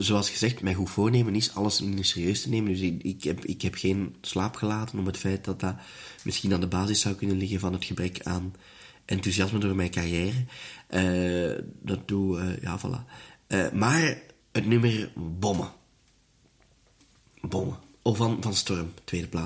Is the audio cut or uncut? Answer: cut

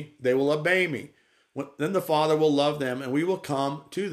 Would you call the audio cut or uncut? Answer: uncut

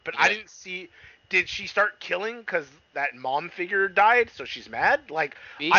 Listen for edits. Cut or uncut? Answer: uncut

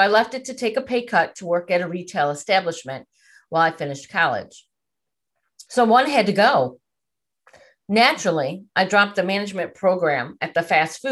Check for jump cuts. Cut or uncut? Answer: cut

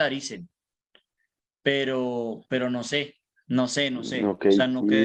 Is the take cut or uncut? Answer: uncut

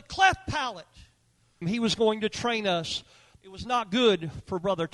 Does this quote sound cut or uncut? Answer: cut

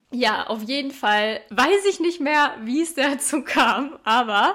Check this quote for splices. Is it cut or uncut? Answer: cut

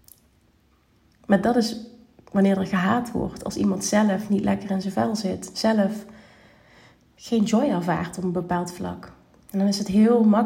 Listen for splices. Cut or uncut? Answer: uncut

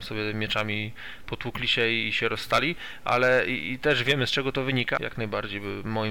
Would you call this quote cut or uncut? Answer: cut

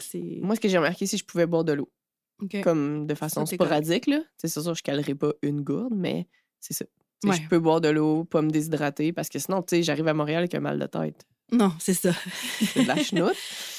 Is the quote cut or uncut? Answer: uncut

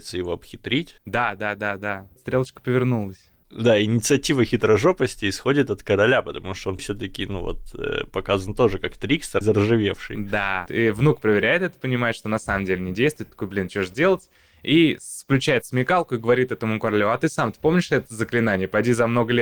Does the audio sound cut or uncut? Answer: cut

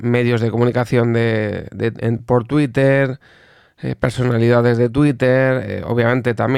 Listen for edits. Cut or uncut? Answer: uncut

